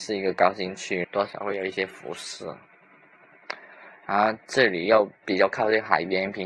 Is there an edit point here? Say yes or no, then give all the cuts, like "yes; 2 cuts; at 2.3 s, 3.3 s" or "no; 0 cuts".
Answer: yes; 1 cut; at 1.0 s